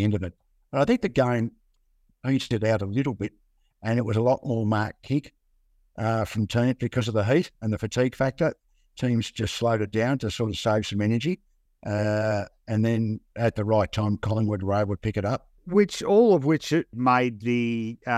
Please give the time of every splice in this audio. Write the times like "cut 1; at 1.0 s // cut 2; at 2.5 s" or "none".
cut 1; at 11.7 s // cut 2; at 15.6 s // cut 3; at 16.9 s